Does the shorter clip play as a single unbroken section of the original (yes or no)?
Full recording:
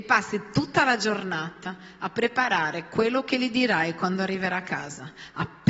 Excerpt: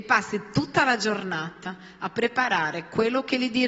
yes